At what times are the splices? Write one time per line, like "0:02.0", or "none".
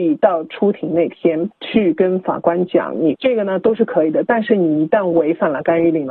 0:03.1